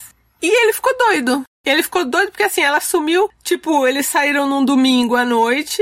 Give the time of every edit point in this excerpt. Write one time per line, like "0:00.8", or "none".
0:01.5

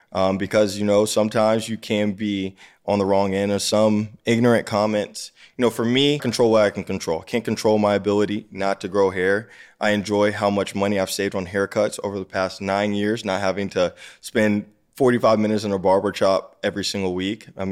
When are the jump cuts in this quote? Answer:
0:06.2

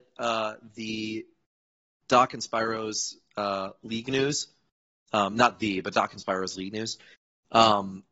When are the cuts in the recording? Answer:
none

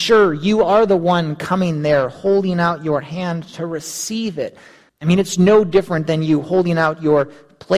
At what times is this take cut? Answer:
0:04.9

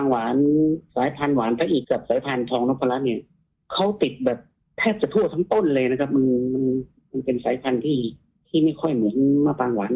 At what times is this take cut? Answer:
0:01.8

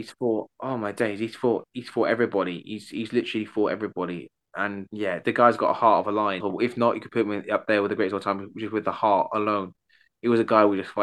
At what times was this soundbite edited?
0:04.9
0:06.4

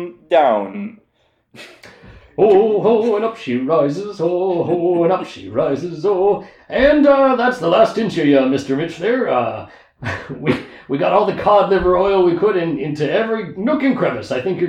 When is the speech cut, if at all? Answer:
none

